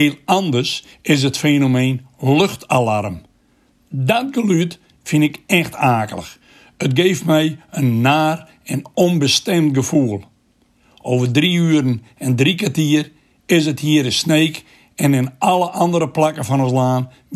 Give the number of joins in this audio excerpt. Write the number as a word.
zero